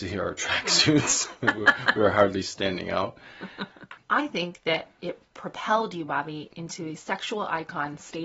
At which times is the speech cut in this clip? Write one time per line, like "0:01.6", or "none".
0:04.0